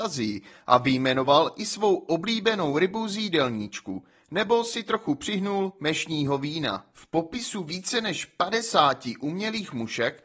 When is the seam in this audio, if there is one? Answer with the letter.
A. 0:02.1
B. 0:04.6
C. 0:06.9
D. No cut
C